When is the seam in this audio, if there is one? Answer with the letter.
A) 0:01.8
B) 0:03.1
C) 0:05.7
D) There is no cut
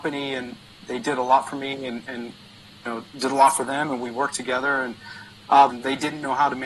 C